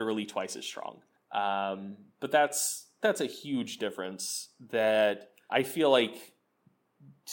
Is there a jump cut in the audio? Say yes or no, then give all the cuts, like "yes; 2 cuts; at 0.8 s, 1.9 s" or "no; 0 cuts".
yes; 2 cuts; at 1.2 s, 5.5 s